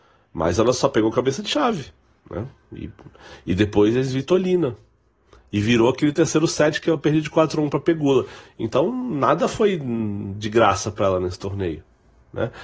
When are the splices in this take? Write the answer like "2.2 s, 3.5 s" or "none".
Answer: none